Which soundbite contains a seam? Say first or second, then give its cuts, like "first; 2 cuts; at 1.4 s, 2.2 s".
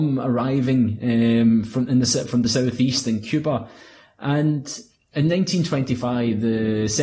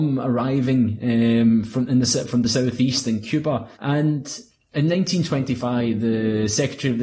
second; 1 cut; at 3.7 s